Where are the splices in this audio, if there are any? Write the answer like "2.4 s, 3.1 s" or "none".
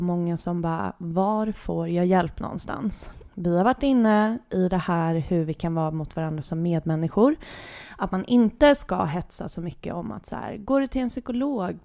3.3 s